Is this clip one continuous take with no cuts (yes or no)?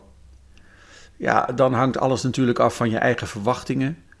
yes